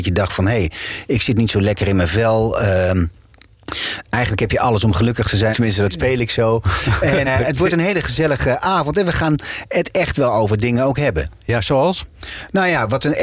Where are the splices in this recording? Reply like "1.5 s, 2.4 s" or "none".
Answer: 5.5 s, 7.2 s